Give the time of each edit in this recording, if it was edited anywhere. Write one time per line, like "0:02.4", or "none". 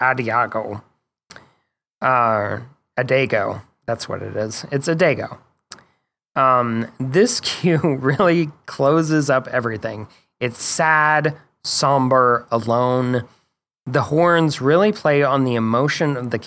none

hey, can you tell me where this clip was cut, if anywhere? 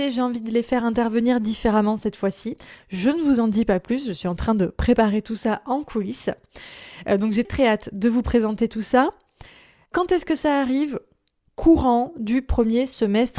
0:07.4

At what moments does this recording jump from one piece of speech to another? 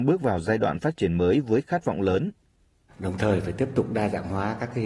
0:02.9

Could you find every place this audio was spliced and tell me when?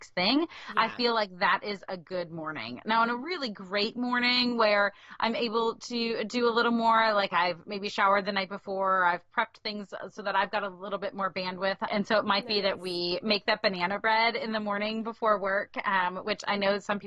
0:11.9

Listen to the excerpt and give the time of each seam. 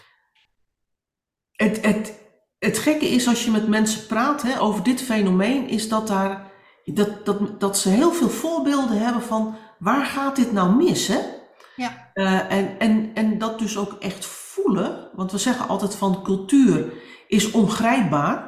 0:04.6

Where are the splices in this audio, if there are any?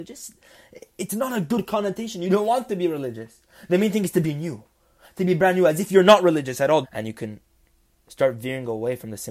0:06.8

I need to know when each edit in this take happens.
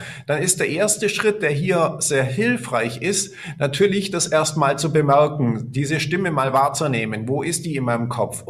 none

